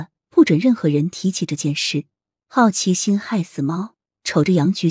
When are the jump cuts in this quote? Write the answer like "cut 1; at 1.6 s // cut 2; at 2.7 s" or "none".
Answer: cut 1; at 2.4 s